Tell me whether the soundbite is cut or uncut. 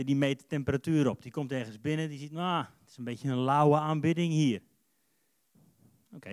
uncut